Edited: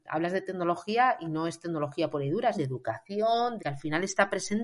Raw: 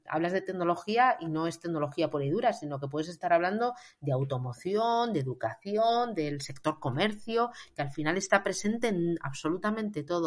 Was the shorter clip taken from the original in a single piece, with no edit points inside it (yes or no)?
no